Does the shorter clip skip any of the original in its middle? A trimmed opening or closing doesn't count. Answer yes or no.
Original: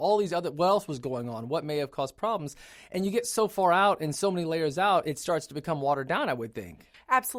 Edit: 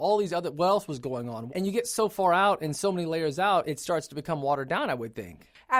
yes